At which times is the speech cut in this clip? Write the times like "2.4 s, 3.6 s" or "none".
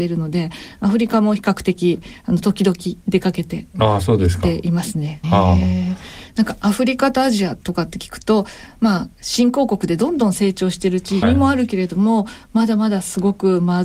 5.2 s, 11.2 s